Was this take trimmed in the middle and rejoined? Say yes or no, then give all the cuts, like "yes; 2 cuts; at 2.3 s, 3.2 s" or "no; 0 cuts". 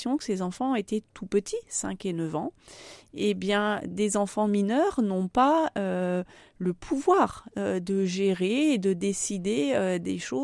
no; 0 cuts